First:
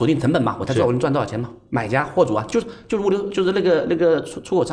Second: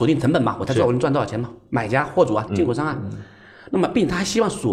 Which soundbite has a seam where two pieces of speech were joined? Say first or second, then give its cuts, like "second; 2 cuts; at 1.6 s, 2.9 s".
second; 1 cut; at 2.5 s